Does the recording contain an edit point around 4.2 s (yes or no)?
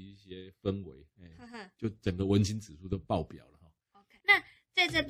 yes